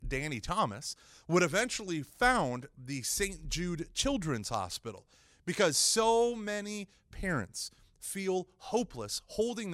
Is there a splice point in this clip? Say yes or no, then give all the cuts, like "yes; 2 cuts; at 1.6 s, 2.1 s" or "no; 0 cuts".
no; 0 cuts